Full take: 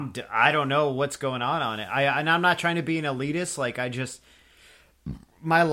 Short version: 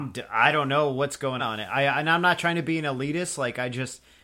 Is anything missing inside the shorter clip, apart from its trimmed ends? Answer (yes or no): yes